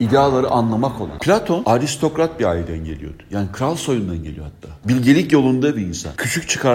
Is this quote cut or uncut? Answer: cut